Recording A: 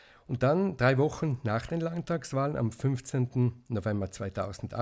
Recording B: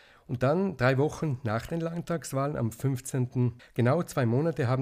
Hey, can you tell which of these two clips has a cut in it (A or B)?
B